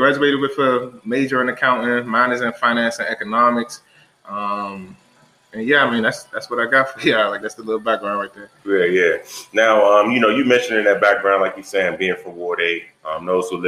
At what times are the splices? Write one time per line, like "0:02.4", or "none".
none